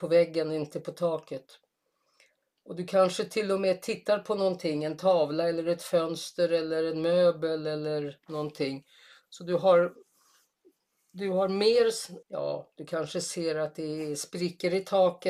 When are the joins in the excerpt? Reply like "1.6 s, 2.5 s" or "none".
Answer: 12.2 s

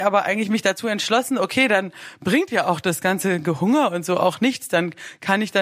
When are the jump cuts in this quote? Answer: none

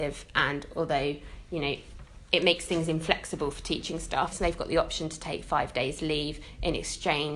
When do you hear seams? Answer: 4.3 s

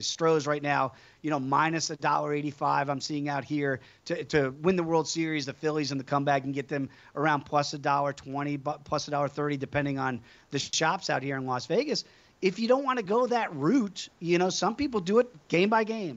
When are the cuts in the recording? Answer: 4.3 s

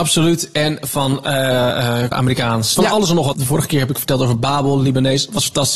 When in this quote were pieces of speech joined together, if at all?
2.1 s, 3.3 s

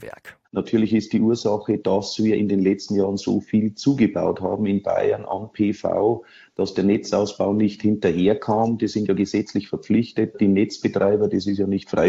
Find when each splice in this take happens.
2.4 s

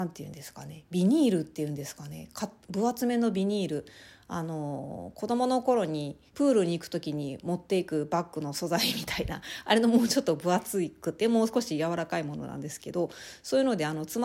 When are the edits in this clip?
6.3 s

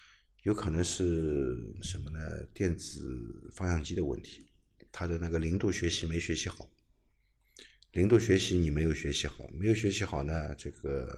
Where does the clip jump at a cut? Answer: none

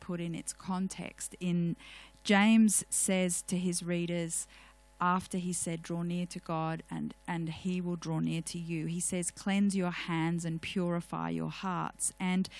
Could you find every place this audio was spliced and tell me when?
none

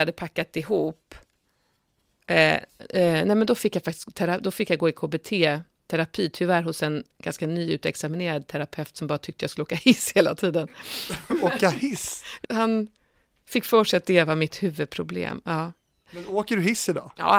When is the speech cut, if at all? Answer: 12.4 s

